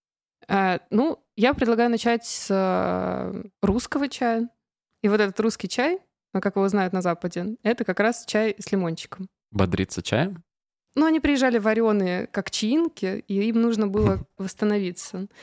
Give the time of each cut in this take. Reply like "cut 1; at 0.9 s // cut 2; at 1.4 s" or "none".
cut 1; at 3.5 s // cut 2; at 9.4 s // cut 3; at 14.4 s